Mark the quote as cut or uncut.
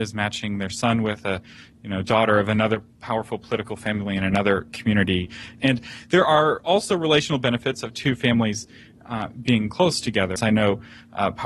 cut